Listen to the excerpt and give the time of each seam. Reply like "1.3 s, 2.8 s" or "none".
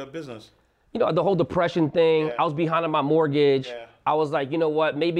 none